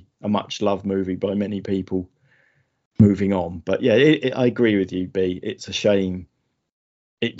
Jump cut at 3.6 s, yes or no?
no